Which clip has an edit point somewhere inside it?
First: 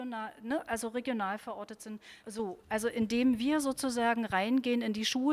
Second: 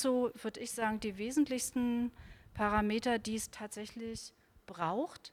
first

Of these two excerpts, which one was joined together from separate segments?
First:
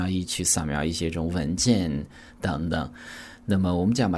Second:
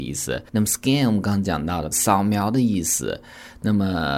second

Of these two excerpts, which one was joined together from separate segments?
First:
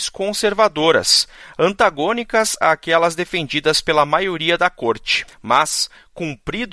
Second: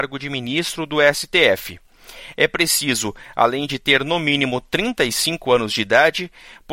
first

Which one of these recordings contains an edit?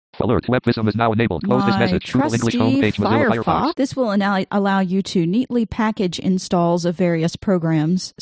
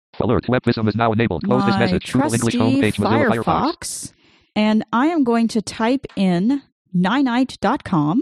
first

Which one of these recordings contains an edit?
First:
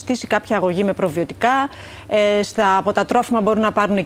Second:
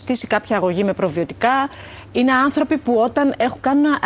second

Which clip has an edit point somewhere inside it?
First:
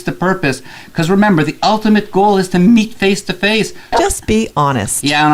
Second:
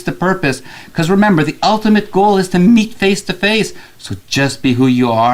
first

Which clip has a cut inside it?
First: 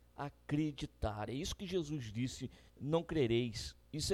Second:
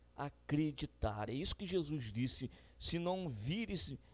first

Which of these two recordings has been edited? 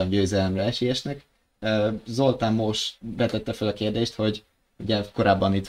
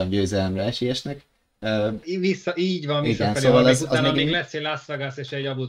second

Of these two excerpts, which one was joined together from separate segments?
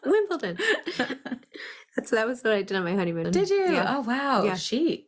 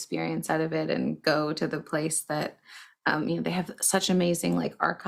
first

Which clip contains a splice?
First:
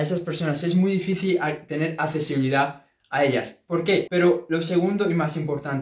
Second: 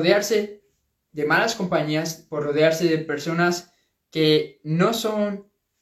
first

